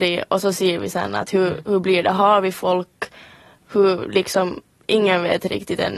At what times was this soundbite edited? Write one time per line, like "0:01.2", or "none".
none

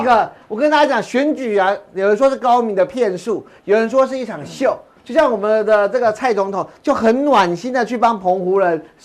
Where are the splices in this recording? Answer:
none

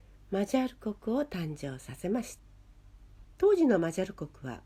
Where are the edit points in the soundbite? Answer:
0:03.3

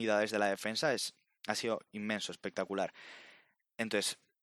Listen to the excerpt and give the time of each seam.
none

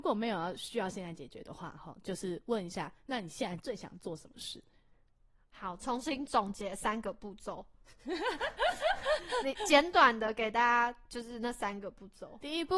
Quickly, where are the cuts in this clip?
0:05.4

